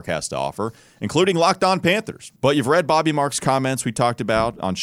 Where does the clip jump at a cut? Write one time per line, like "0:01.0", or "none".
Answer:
0:02.4